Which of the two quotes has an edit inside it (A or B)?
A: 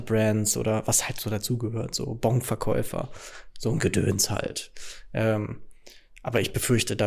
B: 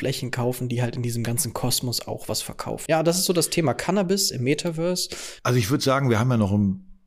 B